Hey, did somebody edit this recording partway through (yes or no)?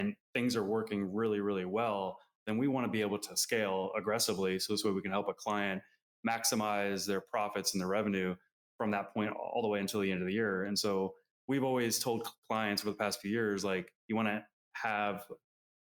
no